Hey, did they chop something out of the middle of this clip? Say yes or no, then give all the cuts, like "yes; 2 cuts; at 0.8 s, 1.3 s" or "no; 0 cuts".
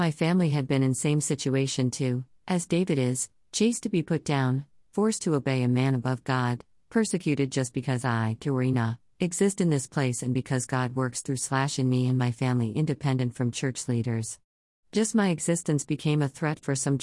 no; 0 cuts